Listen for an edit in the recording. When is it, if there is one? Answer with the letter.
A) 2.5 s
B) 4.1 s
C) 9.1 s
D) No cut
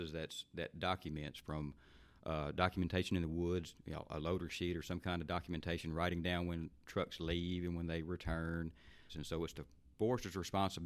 C